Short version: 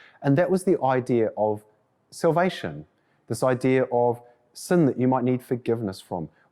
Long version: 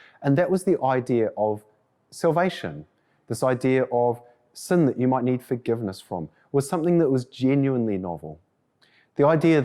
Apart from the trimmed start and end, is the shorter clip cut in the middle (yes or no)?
no